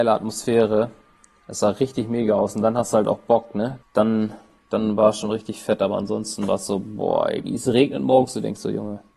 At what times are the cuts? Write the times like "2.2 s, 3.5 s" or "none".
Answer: 3.8 s, 7.4 s